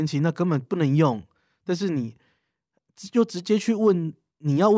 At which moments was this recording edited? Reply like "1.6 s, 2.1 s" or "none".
none